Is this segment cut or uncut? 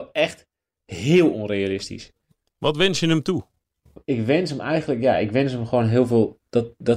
uncut